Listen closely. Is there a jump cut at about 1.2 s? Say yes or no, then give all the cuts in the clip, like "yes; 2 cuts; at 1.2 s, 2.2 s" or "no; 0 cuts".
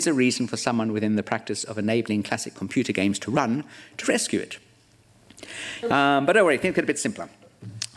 no; 1 cut; at 5.8 s